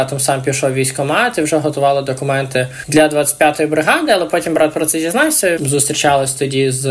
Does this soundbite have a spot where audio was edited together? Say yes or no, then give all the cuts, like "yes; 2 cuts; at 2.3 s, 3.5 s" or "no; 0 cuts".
yes; 1 cut; at 5.6 s